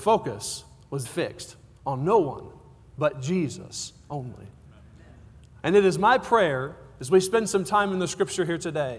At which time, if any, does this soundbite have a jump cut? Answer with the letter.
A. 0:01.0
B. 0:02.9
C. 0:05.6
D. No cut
A